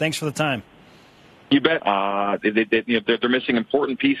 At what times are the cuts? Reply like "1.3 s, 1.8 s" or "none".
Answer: 1.8 s